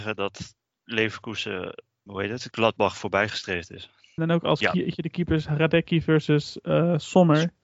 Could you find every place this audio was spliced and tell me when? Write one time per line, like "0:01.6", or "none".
0:02.1
0:04.2

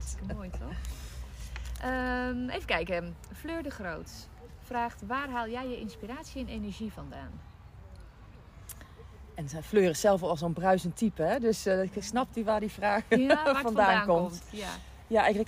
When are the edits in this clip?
none

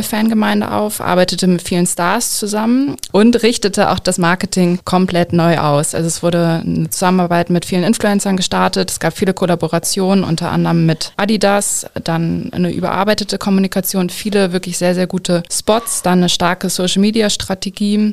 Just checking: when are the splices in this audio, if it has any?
none

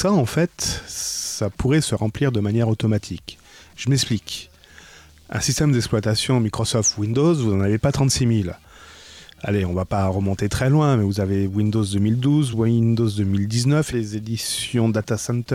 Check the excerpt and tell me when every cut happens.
0:12.5
0:13.9

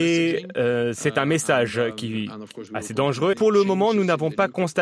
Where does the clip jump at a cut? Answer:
0:03.3

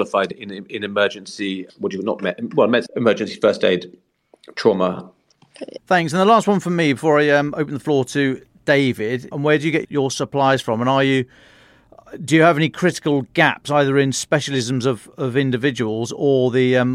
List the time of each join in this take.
0:05.8
0:09.3

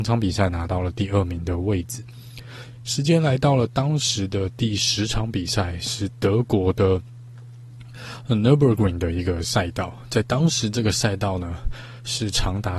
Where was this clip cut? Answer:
none

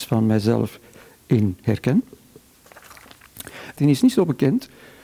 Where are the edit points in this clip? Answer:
0:03.8

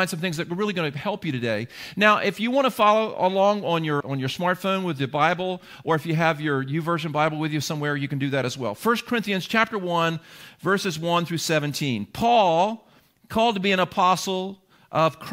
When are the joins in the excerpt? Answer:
0:04.0

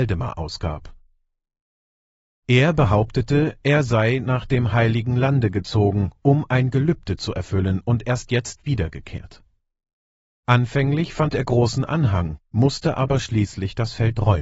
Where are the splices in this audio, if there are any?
none

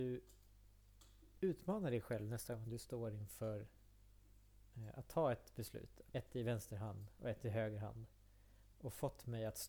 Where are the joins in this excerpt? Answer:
0:06.1
0:08.7

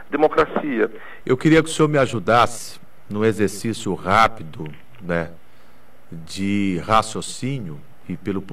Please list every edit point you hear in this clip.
0:01.2

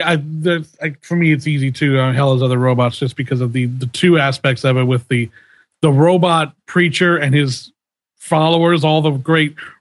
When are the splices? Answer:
none

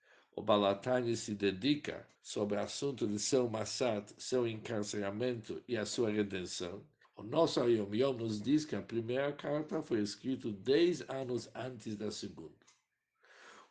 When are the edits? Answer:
0:02.2
0:07.0

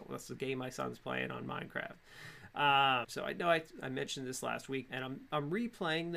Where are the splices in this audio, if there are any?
0:03.0
0:04.9

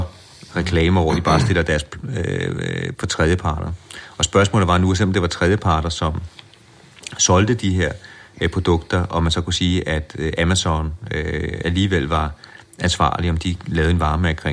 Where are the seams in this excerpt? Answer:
0:02.9

